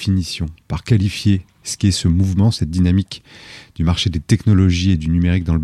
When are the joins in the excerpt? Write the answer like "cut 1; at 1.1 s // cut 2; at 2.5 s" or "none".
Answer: none